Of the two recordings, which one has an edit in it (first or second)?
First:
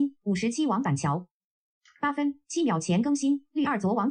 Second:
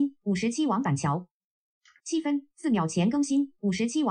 second